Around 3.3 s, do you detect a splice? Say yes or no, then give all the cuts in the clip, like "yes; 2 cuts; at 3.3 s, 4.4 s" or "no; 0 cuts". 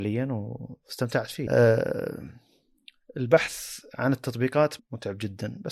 no; 1 cut; at 4.8 s